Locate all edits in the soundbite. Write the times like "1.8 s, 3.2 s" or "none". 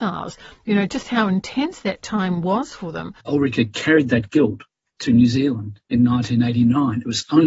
3.2 s